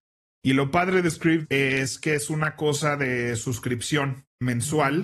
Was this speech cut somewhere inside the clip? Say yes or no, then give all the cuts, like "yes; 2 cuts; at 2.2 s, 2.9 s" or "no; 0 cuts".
no; 0 cuts